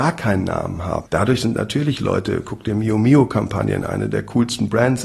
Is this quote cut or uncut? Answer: cut